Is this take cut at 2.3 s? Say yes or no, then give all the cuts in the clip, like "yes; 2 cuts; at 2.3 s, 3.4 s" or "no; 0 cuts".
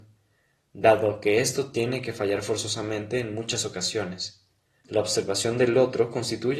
no; 1 cut; at 4.8 s